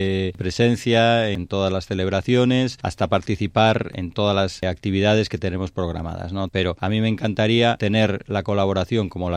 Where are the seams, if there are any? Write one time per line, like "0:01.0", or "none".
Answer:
0:06.5